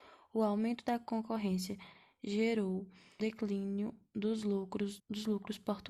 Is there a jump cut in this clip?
yes; 2 cuts; at 3.2 s, 5.0 s

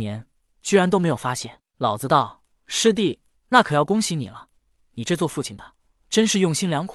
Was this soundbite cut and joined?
yes; 2 cuts; at 3.3 s, 4.8 s

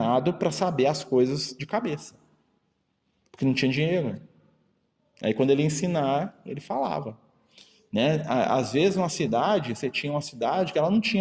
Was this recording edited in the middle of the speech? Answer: no; 0 cuts

